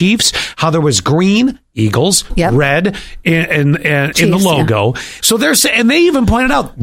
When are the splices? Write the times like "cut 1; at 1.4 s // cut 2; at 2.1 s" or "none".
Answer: cut 1; at 4.1 s // cut 2; at 5.2 s